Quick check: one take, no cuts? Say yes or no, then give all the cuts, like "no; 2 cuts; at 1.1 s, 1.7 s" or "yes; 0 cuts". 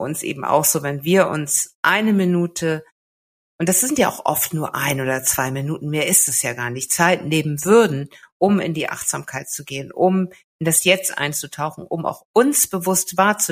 yes; 0 cuts